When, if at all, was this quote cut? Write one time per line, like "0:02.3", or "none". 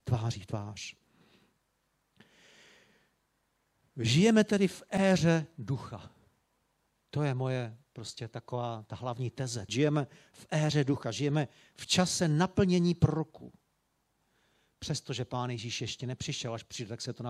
0:09.7